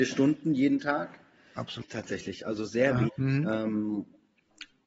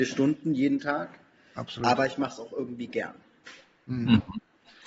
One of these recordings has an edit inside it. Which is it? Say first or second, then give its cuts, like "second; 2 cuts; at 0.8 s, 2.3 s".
first; 2 cuts; at 1.8 s, 3.1 s